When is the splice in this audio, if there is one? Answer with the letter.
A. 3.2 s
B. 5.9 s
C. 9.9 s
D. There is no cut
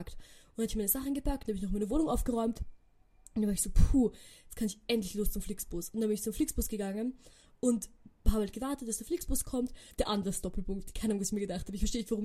C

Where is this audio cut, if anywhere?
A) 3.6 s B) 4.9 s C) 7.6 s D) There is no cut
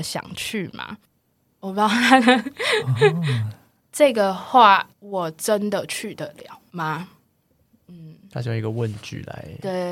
B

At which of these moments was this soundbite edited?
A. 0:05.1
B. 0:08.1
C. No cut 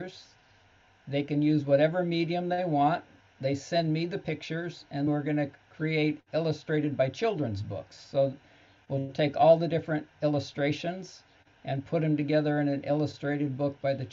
A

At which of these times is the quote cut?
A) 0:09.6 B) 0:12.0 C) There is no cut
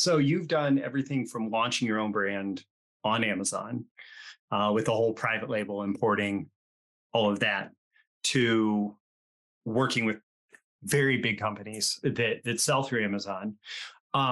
C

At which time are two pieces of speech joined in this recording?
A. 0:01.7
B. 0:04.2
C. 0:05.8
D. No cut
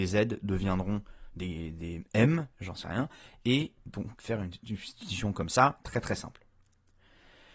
B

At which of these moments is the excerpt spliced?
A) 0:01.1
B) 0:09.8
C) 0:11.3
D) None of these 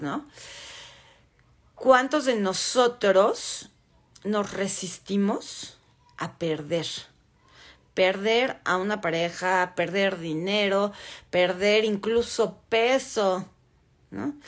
B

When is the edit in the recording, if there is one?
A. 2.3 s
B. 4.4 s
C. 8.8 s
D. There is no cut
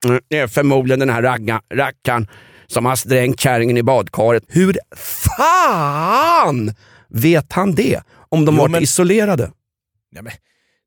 B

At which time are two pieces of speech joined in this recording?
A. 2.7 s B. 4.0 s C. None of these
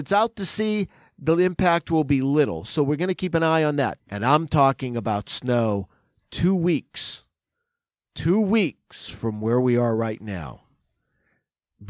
B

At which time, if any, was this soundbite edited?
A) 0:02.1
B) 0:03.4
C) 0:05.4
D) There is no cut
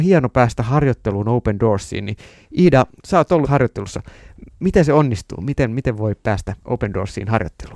B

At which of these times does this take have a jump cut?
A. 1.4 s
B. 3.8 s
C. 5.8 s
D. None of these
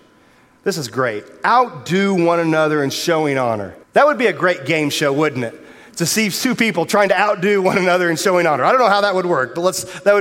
B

